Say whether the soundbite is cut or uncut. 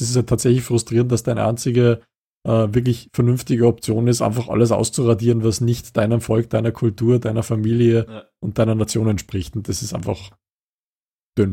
uncut